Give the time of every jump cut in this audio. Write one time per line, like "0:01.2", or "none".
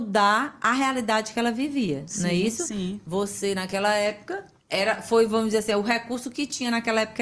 0:04.6